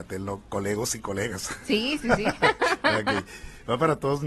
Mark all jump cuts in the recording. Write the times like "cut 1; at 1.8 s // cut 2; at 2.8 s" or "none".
none